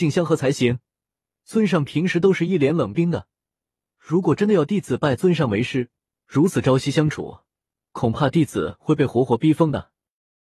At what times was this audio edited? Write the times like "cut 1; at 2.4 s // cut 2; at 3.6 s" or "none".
cut 1; at 2.9 s // cut 2; at 6.2 s